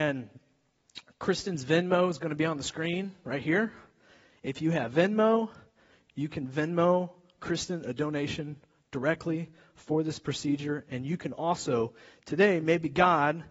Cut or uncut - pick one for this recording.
uncut